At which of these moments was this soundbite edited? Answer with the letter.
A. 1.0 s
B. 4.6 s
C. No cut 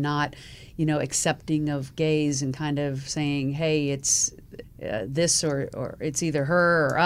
B